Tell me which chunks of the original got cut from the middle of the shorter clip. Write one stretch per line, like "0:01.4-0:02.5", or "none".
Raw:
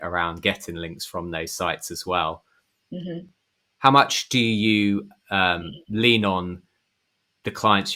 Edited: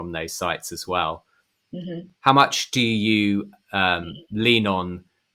0:03.3-0:03.7